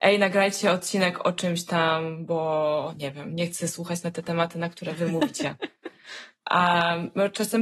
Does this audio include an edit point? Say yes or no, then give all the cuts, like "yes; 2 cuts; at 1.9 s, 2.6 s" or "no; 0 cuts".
no; 0 cuts